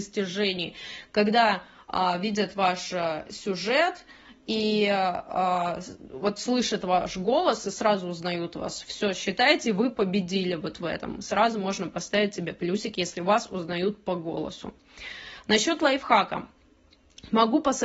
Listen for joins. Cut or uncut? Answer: uncut